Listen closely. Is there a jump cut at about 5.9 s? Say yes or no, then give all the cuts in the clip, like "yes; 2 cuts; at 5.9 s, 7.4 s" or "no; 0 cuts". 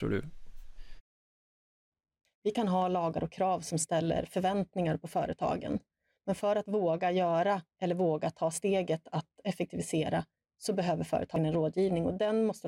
no; 2 cuts; at 2.2 s, 7.7 s